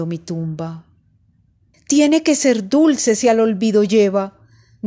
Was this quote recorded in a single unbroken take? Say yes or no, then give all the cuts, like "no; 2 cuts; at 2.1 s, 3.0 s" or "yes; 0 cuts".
no; 1 cut; at 1.7 s